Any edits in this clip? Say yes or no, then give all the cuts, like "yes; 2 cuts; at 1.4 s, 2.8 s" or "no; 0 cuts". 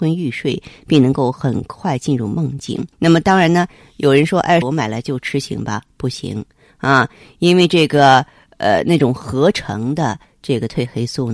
yes; 2 cuts; at 2.9 s, 4.6 s